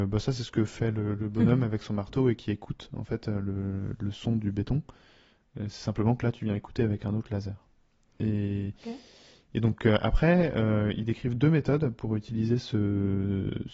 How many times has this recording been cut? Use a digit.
0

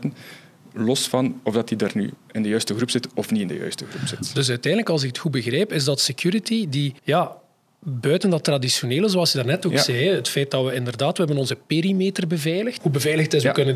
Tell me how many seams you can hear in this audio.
2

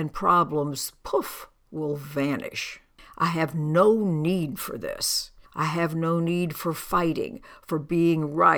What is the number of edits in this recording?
1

